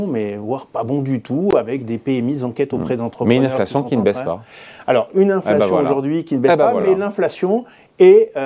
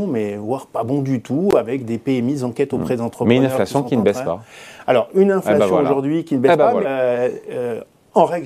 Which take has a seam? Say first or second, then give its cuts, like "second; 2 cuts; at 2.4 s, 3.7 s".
second; 1 cut; at 6.8 s